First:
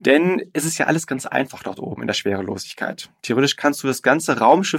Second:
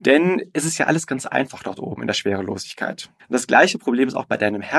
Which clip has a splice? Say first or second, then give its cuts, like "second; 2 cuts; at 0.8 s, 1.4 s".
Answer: second; 1 cut; at 3.2 s